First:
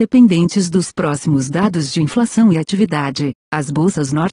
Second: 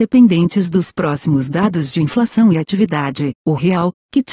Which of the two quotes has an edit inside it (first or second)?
second